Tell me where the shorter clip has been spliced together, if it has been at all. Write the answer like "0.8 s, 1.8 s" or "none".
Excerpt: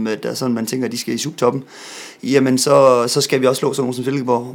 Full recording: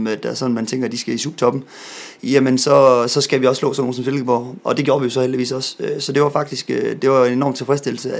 none